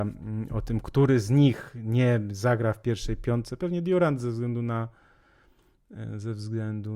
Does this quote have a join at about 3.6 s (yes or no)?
no